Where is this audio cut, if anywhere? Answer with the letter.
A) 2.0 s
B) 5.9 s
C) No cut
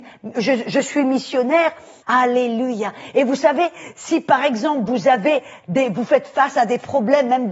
A